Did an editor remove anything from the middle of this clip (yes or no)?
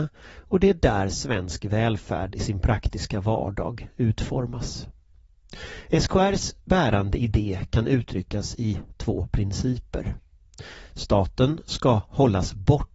no